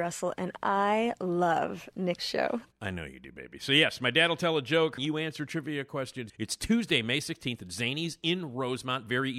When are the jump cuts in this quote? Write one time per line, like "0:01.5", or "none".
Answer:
0:05.0
0:06.3